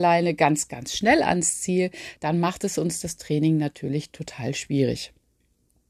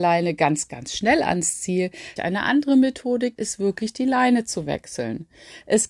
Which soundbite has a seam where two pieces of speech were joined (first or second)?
second